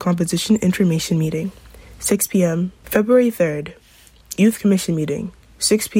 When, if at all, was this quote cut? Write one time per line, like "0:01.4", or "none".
0:02.8